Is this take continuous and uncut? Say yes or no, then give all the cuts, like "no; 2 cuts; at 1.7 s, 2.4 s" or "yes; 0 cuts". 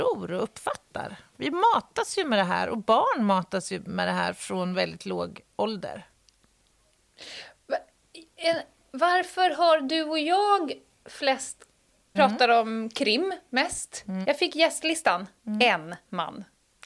no; 3 cuts; at 12.1 s, 14.2 s, 15.4 s